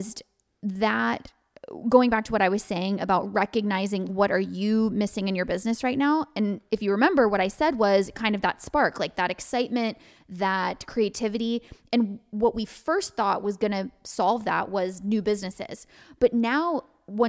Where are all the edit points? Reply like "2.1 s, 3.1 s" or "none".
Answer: 4.1 s